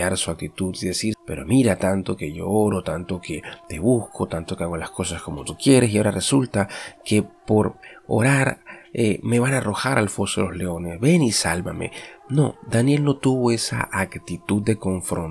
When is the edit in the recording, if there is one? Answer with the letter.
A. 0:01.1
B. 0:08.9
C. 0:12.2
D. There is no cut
A